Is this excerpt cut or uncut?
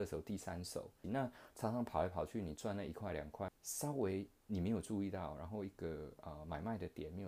cut